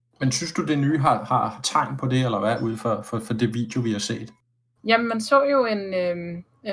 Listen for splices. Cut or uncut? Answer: uncut